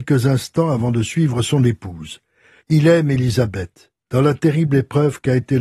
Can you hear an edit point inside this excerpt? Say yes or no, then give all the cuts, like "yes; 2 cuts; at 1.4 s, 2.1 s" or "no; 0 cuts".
yes; 1 cut; at 2.6 s